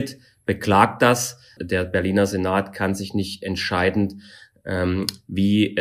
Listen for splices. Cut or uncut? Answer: cut